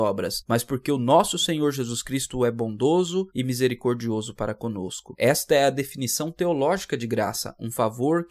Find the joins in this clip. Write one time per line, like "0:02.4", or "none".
none